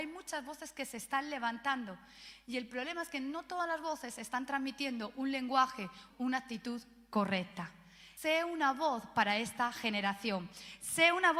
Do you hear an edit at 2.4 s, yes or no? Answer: no